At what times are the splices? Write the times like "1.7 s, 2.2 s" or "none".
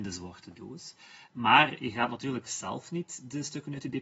none